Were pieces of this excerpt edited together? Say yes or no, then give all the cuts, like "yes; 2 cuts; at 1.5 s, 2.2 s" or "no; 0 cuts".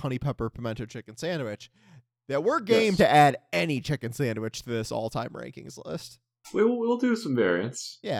no; 0 cuts